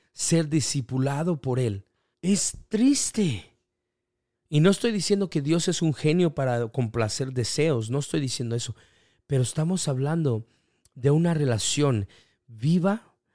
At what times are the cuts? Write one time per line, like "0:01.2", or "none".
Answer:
0:02.1
0:04.3